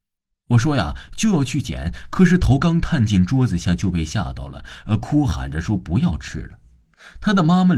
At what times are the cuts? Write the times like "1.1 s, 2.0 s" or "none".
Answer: 2.6 s